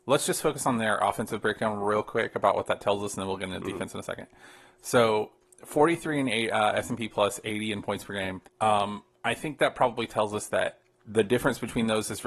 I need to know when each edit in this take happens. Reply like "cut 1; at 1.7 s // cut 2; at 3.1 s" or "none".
cut 1; at 8.5 s // cut 2; at 10.9 s